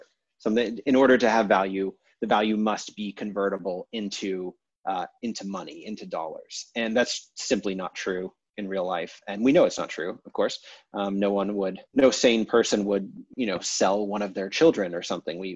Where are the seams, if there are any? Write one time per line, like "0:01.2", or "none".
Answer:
0:11.9
0:13.3